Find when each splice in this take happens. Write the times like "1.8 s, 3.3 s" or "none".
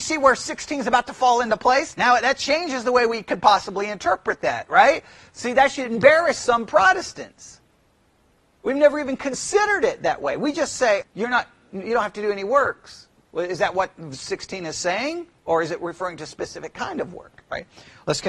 11.0 s